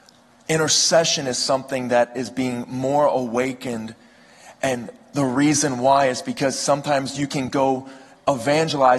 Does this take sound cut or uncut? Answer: uncut